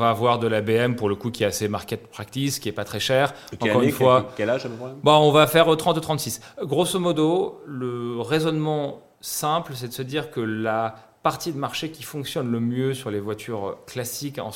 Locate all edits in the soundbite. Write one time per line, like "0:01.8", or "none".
none